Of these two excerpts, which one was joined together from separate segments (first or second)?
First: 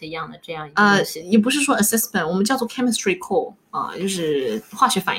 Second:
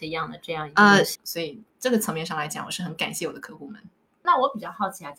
second